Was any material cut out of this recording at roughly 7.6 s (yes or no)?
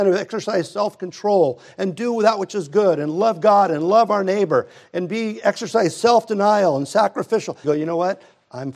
yes